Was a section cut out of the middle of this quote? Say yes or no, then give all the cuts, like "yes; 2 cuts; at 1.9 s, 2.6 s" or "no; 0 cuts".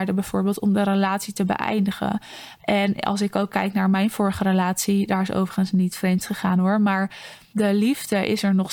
yes; 1 cut; at 2.6 s